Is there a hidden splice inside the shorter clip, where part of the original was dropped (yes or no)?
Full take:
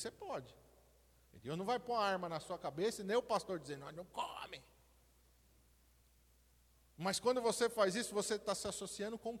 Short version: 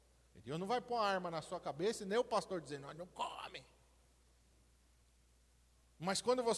no